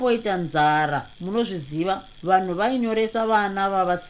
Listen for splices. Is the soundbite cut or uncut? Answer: cut